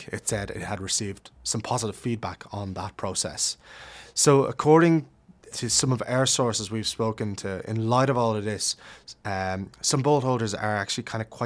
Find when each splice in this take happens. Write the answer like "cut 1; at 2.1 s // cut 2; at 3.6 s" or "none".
cut 1; at 5.5 s